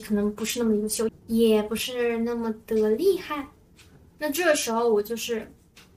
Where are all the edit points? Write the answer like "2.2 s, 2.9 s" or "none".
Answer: 1.1 s